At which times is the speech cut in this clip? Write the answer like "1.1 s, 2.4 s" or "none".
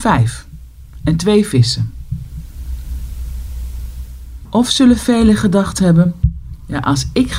4.5 s